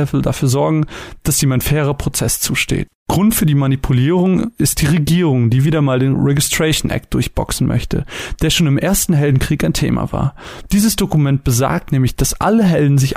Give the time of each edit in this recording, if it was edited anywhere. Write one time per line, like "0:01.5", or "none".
none